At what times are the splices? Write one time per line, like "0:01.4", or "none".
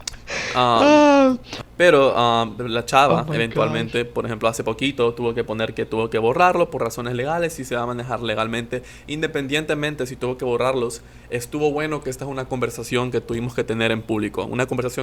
none